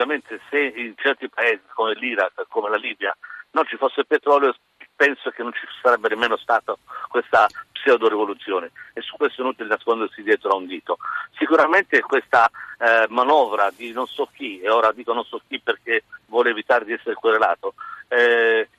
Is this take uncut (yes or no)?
yes